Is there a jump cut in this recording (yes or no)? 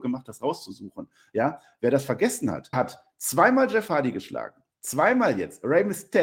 yes